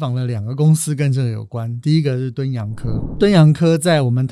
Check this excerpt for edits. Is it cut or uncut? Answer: uncut